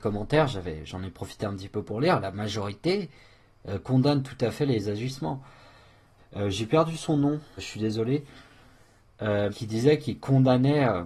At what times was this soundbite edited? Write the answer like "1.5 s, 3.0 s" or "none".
6.2 s, 7.6 s, 9.5 s